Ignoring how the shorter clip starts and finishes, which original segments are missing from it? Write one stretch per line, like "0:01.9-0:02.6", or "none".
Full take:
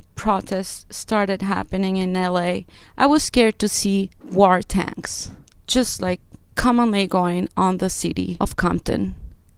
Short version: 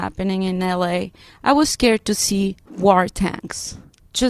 none